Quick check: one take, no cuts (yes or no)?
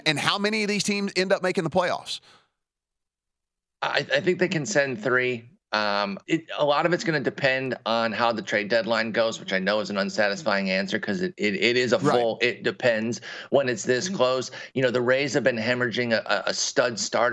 no